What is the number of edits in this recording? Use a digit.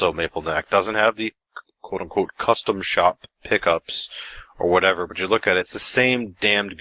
0